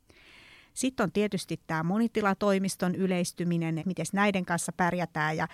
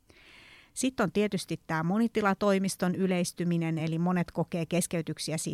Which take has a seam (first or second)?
first